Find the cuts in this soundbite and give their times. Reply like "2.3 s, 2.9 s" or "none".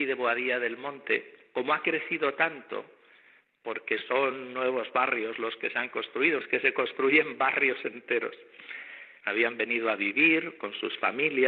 6.4 s, 9.2 s